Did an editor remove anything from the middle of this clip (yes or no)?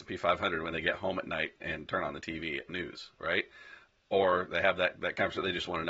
no